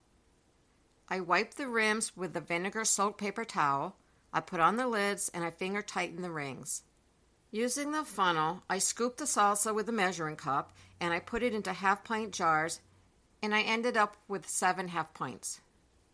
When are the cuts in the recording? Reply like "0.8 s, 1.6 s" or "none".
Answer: 1.0 s, 7.4 s

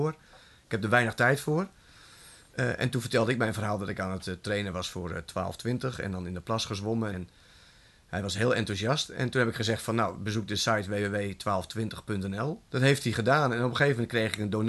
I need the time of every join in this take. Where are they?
7.1 s, 12.7 s

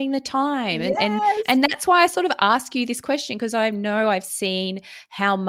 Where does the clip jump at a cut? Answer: none

